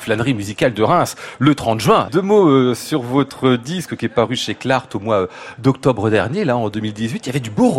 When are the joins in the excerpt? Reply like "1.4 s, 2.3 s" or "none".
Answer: 2.1 s